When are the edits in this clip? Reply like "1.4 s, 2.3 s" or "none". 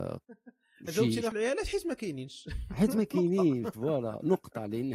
1.3 s